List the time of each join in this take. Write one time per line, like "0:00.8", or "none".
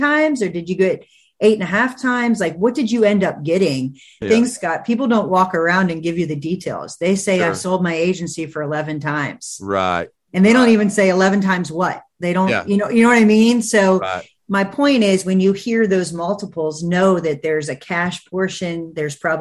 0:04.2